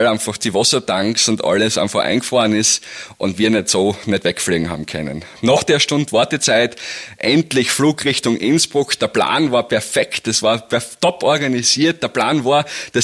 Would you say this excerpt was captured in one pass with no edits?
yes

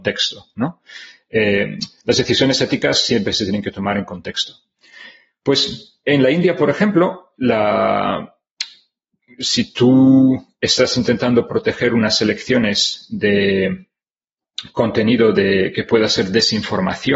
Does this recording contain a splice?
no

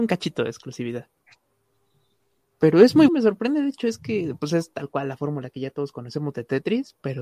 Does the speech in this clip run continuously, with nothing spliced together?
no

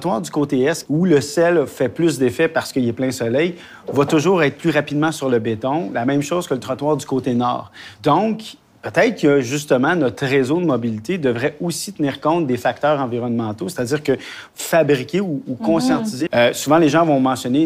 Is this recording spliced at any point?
yes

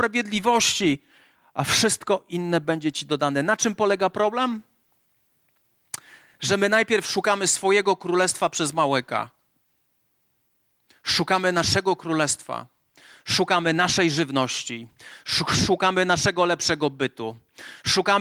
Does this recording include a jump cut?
no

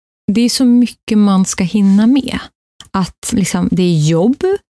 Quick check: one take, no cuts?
no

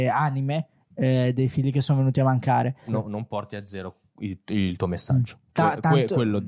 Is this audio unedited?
no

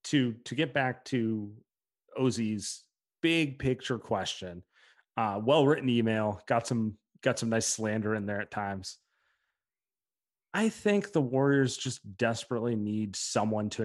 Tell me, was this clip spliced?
no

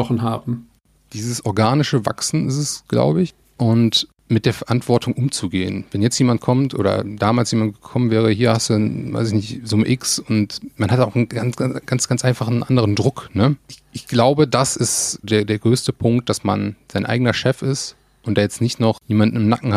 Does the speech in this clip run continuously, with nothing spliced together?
no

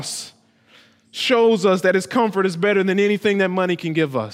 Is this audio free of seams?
yes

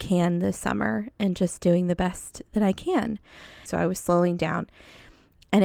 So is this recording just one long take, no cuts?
no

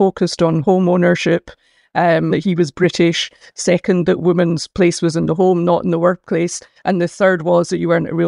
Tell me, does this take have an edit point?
yes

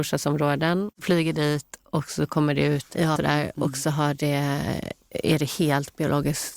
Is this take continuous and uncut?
no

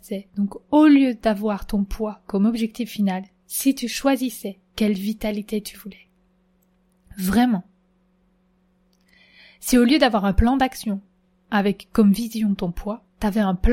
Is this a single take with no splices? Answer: yes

